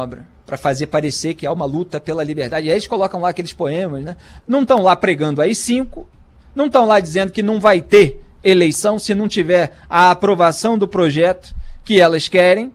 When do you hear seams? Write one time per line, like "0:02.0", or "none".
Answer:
0:04.4